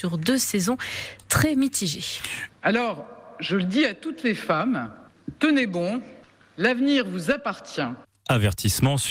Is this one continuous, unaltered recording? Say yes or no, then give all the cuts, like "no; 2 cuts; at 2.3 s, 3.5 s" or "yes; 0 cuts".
no; 1 cut; at 2.5 s